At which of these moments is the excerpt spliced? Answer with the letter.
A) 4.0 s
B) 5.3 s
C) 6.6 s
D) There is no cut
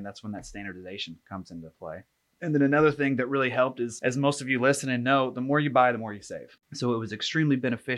C